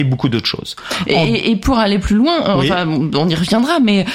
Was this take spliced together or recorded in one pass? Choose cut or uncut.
uncut